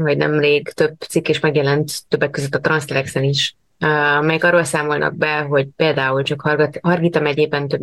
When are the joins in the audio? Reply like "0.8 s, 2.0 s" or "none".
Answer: none